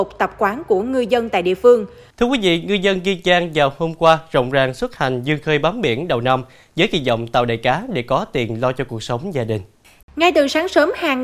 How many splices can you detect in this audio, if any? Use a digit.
2